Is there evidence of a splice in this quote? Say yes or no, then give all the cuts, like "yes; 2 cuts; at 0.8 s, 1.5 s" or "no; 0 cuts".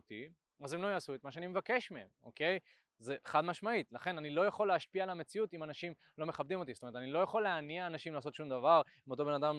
no; 0 cuts